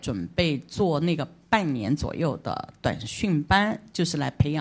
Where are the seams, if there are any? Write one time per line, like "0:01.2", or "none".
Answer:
none